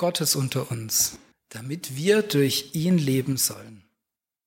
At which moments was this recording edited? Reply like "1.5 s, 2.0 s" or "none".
1.3 s